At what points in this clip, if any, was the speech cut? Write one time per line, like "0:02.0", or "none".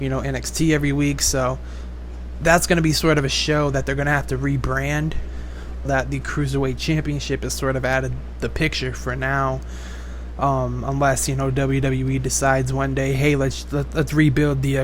0:05.8